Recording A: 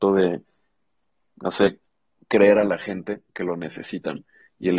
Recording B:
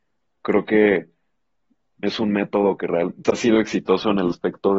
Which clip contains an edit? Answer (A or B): B